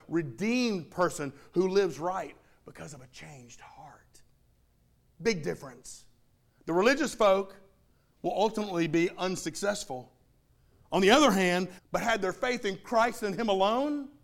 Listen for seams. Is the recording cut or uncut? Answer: cut